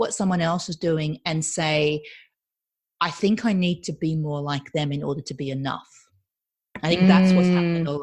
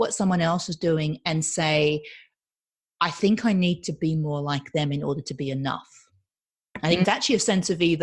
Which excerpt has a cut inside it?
second; 1 cut; at 7.0 s

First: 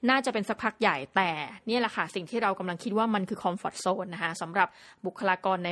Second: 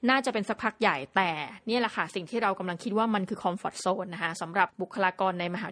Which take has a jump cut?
second; 1 cut; at 4.7 s

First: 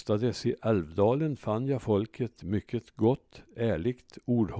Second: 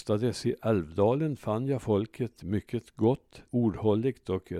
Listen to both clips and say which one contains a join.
second; 1 cut; at 3.5 s

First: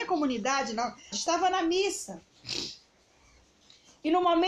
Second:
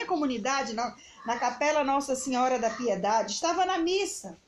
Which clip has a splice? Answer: first; 1 cut; at 1.1 s

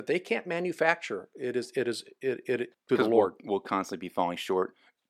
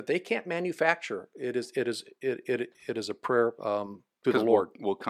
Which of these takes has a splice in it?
first; 1 cut; at 2.7 s

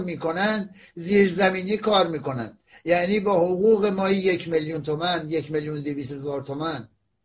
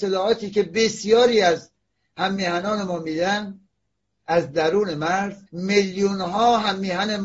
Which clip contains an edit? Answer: second; 1 cut; at 5.5 s

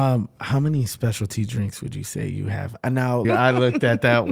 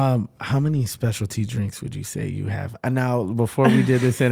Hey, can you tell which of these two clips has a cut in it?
first; 1 cut; at 3.2 s

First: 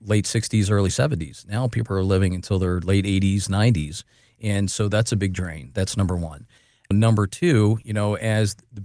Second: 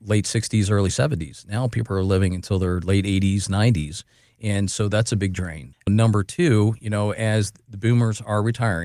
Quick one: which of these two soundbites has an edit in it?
second; 1 cut; at 5.7 s

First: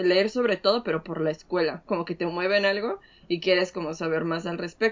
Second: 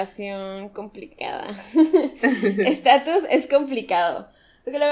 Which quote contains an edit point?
first; 1 cut; at 1.9 s

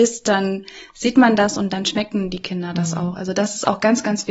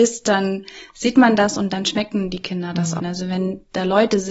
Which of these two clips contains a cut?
second; 1 cut; at 3.0 s

